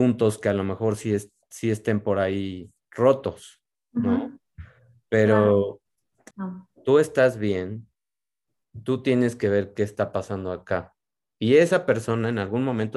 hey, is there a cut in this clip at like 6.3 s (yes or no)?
yes